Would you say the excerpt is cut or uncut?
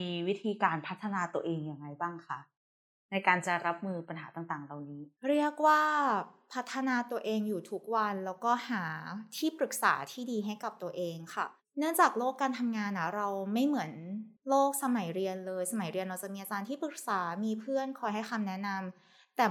cut